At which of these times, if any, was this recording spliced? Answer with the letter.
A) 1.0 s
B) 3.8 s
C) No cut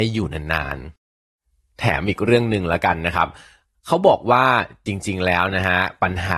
A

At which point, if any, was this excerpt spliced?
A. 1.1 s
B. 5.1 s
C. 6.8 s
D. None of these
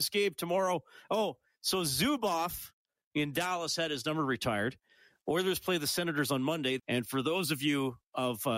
C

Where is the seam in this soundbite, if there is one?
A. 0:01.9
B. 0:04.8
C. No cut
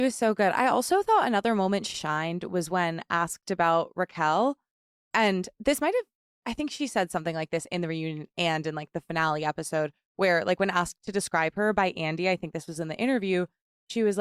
A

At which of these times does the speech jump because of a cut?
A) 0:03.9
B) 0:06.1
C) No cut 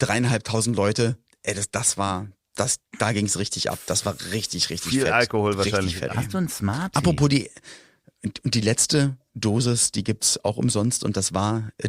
B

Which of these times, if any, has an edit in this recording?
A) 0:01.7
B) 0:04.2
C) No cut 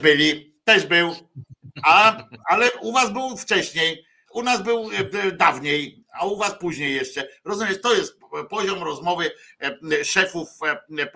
B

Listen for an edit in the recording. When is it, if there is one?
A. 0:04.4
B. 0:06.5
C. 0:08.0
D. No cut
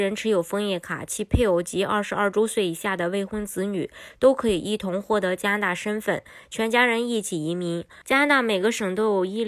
C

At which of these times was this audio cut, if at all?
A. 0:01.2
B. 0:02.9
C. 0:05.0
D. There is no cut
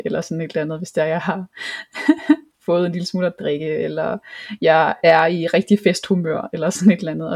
D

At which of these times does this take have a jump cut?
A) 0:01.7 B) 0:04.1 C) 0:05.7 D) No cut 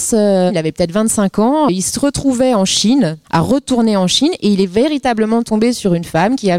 A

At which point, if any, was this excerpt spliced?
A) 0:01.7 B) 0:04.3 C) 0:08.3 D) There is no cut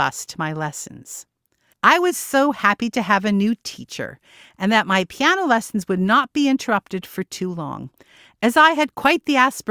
A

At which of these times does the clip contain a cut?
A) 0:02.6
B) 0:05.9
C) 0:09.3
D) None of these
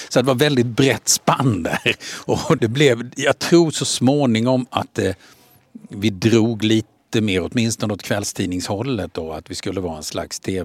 A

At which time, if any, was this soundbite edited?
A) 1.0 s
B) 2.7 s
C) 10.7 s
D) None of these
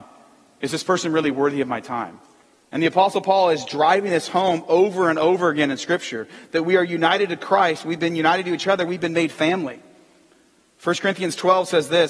B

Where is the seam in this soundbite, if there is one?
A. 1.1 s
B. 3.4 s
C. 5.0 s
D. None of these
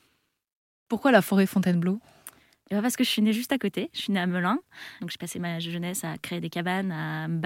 C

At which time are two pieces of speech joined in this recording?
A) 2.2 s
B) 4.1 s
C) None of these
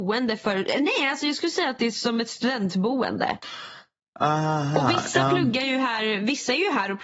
C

